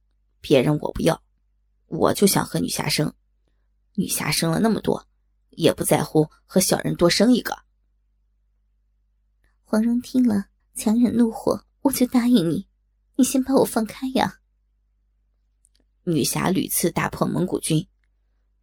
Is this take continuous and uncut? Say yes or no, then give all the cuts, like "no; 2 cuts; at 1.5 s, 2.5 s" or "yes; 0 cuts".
no; 2 cuts; at 10.6 s, 11.7 s